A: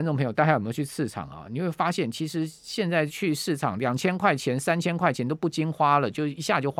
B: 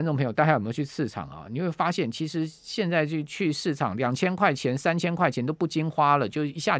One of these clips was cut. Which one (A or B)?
A